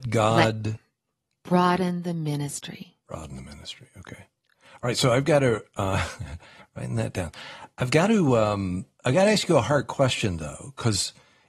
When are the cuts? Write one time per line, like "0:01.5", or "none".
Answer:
none